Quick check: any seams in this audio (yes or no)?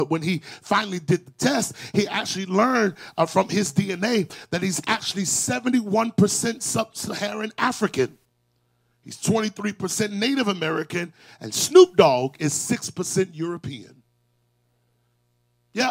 no